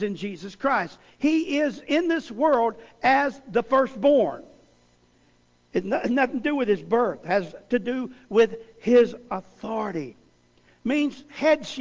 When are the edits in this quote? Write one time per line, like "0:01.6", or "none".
none